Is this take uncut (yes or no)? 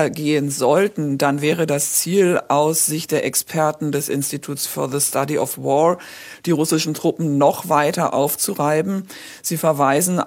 yes